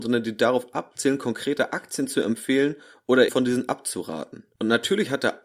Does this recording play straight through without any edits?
no; 1 cut; at 3.3 s

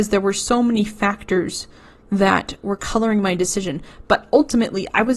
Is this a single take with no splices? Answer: yes; 0 cuts

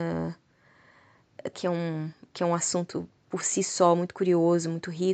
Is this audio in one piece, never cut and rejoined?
no; 1 cut; at 1.5 s

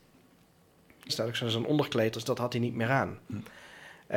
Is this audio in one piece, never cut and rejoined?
no; 2 cuts; at 1.1 s, 2.1 s

